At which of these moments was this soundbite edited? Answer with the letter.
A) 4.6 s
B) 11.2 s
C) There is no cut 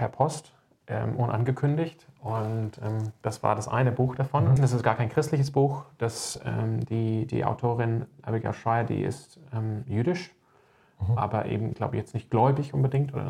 A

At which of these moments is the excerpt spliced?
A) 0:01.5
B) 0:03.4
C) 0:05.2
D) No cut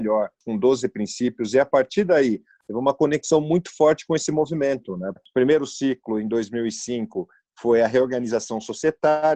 C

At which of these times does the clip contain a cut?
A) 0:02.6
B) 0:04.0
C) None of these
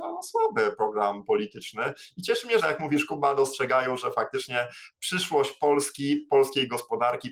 A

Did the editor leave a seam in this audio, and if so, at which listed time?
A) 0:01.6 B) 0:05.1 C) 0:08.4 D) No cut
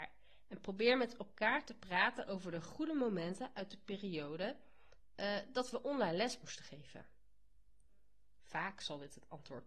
C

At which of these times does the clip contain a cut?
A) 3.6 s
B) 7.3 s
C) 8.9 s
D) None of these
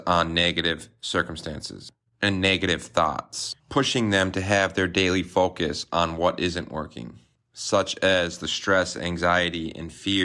A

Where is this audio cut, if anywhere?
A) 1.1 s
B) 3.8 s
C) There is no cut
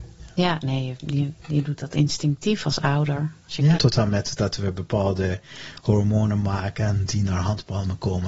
B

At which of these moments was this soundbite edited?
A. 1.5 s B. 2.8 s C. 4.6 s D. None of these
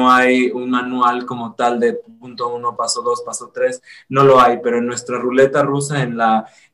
B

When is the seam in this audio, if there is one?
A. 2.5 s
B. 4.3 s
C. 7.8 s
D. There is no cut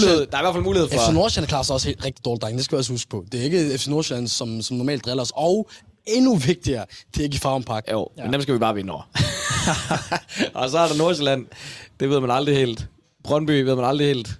C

